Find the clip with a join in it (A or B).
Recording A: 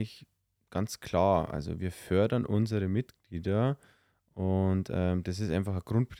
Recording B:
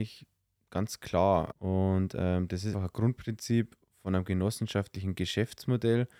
B